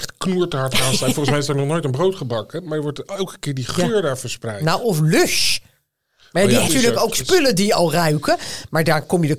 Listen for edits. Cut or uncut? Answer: cut